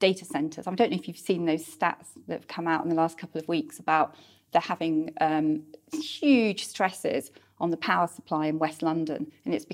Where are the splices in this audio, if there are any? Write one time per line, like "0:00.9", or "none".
none